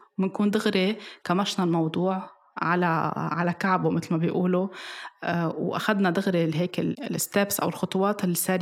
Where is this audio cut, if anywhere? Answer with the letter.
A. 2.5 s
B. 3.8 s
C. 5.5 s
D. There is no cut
D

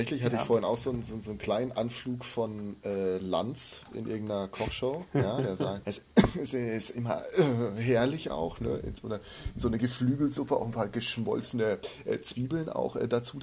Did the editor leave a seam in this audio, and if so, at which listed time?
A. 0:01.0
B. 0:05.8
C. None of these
B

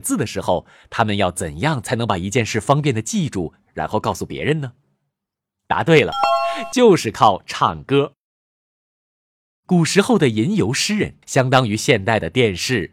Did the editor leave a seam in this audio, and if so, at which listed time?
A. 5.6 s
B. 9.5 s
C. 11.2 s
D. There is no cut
C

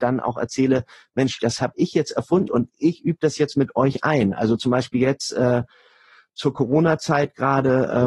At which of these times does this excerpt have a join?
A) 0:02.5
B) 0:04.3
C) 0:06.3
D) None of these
A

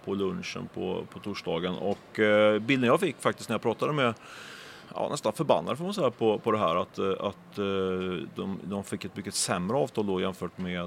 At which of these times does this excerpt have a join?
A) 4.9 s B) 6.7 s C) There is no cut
A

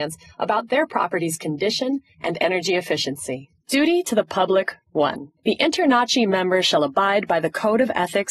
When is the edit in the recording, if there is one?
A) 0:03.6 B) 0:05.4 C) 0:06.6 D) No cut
D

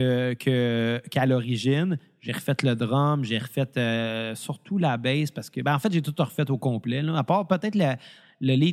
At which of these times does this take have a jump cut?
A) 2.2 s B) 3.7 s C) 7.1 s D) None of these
D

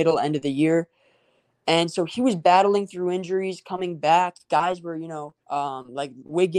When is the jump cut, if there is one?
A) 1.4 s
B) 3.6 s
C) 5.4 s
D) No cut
C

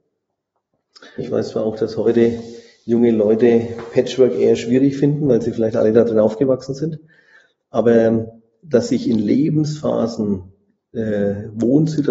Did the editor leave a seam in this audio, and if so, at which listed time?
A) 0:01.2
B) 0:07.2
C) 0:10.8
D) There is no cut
A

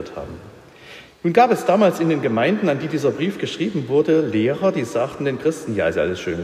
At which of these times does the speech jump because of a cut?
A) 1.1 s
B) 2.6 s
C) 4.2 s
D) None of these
A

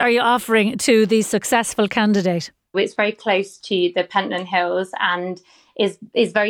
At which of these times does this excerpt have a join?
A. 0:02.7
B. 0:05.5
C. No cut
A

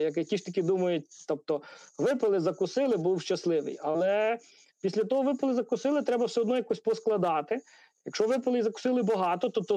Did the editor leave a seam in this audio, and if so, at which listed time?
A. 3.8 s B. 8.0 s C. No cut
C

